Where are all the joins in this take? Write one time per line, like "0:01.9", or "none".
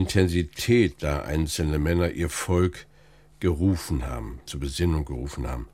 0:04.5